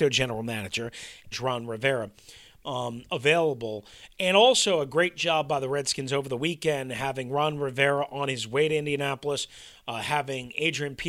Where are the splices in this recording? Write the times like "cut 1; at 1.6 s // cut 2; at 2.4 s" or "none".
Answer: cut 1; at 1.3 s